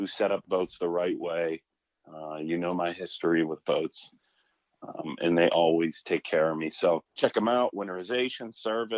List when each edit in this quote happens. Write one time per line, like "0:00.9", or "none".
0:07.1